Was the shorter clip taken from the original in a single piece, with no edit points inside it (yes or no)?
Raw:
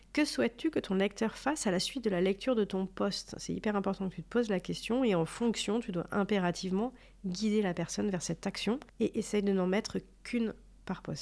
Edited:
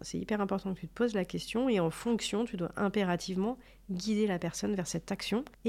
yes